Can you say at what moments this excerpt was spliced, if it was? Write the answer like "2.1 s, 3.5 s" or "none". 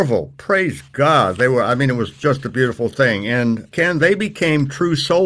none